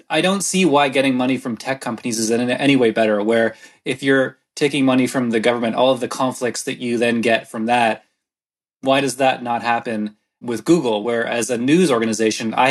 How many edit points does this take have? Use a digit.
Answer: 0